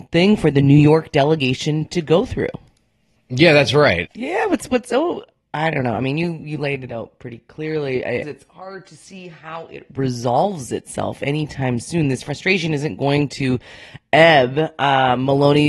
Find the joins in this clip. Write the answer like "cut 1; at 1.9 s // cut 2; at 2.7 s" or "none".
cut 1; at 4.1 s // cut 2; at 8.2 s